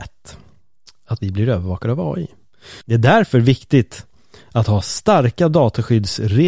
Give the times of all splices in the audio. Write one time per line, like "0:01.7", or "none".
0:02.8